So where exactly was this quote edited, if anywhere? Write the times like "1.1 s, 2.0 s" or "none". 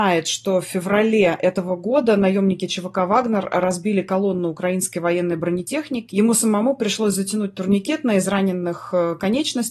6.1 s